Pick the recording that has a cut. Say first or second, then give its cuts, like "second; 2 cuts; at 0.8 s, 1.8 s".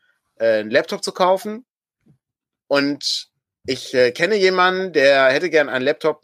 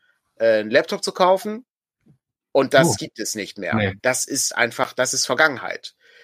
second; 2 cuts; at 2.4 s, 4.0 s